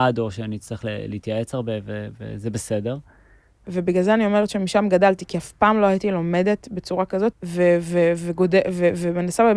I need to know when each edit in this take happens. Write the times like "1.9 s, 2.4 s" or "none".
3.7 s, 7.3 s